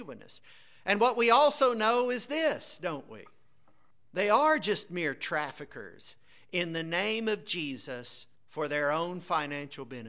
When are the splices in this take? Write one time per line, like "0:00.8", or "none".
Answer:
0:03.9
0:08.4